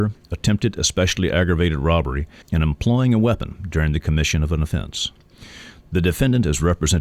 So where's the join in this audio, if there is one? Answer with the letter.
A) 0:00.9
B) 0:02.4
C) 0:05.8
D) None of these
B